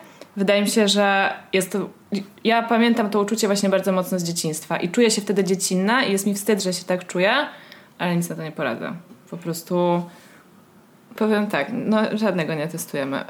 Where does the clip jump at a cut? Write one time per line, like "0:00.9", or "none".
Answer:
0:11.2